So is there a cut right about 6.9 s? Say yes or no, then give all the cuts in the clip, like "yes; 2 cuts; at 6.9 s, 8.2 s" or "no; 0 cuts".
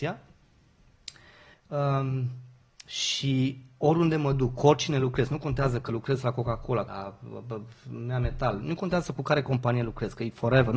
yes; 2 cuts; at 1.5 s, 6.9 s